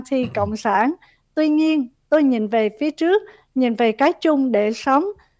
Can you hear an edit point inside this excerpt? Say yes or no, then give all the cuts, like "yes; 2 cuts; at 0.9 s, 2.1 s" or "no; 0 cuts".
no; 0 cuts